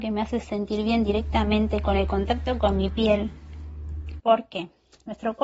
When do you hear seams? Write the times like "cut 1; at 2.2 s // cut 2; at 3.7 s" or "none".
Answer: cut 1; at 4.2 s